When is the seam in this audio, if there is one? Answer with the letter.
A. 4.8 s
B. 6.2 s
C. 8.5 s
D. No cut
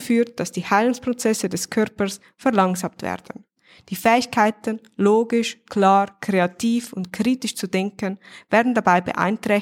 D